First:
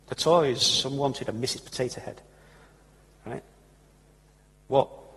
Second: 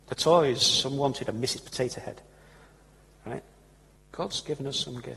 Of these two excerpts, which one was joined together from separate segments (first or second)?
second